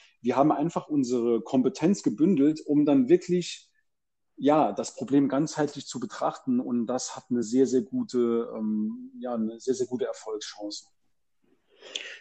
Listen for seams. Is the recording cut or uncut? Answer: uncut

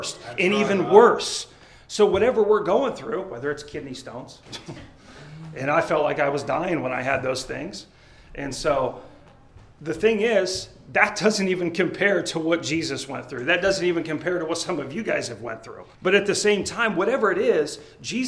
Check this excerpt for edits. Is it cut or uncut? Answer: cut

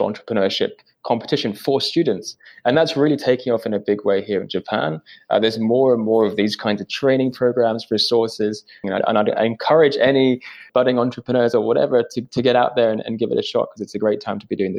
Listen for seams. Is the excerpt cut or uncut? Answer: cut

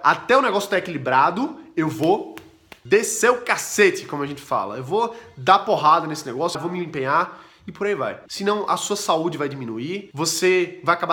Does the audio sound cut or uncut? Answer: cut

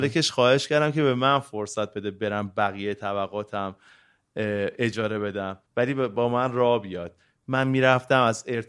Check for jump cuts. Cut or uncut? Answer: cut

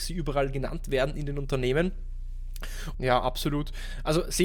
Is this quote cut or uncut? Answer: cut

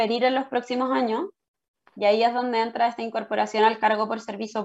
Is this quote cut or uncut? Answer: cut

